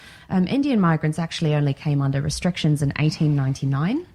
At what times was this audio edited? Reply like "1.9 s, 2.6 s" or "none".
none